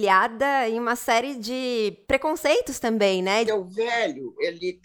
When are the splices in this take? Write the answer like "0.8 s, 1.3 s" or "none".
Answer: 2.0 s, 3.5 s